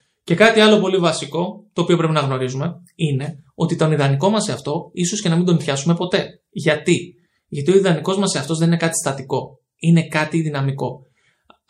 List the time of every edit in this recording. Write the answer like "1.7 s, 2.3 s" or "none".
none